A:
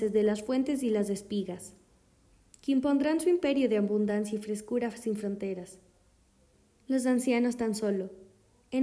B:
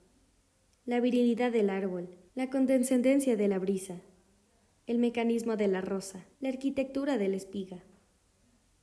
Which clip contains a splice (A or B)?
B